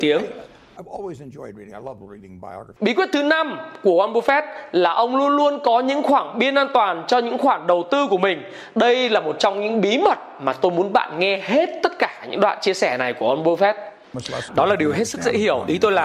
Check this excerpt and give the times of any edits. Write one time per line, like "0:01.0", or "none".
0:02.8
0:14.5